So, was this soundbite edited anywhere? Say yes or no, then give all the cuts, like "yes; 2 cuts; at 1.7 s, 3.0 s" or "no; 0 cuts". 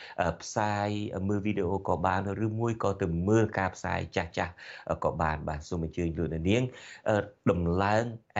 yes; 1 cut; at 7.4 s